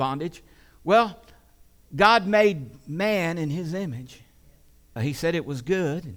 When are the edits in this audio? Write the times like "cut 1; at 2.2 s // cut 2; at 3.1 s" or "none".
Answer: cut 1; at 5.0 s